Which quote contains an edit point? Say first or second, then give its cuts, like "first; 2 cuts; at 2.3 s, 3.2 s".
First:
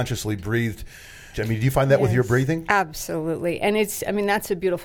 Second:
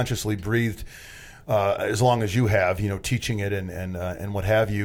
first; 1 cut; at 1.3 s